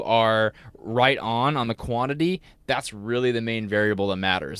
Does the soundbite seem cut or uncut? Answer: uncut